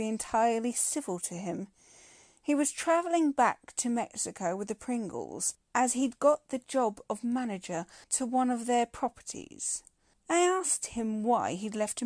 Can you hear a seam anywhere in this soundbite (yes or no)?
yes